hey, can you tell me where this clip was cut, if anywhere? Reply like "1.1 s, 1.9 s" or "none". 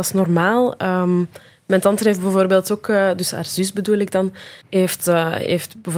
4.6 s